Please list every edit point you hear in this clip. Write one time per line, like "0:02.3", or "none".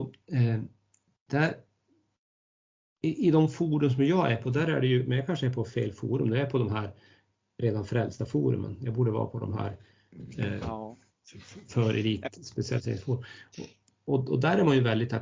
none